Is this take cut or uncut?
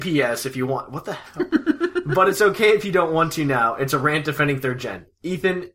uncut